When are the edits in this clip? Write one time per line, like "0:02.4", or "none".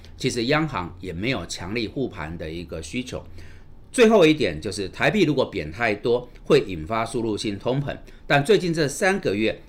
none